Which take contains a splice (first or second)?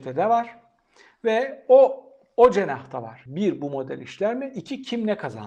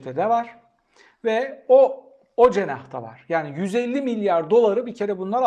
first